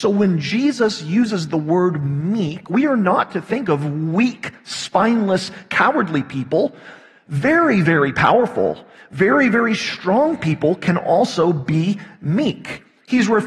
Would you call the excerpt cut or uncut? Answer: uncut